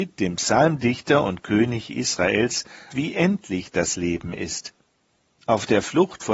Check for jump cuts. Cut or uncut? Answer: cut